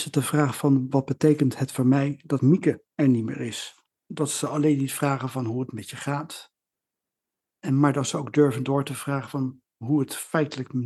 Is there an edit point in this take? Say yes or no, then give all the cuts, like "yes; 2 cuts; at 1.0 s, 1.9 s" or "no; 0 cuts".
yes; 1 cut; at 3.9 s